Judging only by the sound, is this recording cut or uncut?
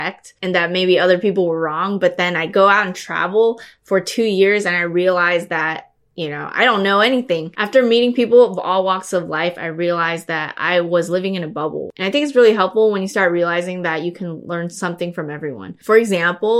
cut